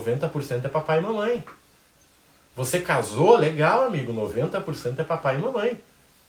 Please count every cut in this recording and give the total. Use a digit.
0